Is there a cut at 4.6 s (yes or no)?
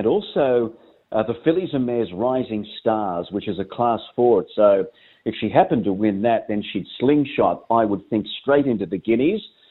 yes